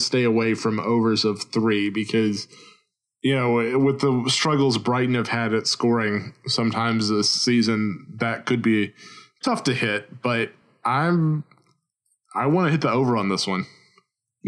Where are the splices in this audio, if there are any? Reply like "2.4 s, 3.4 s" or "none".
none